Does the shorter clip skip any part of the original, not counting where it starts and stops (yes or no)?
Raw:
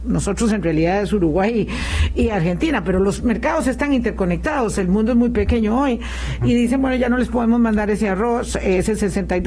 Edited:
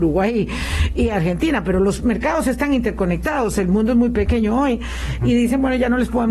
no